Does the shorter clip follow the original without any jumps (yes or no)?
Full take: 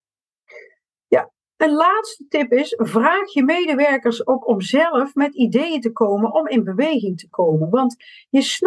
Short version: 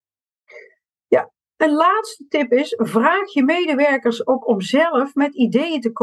yes